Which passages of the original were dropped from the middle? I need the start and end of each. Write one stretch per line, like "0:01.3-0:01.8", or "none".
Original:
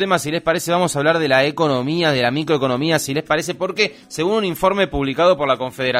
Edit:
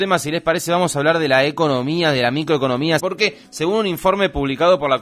0:03.0-0:03.6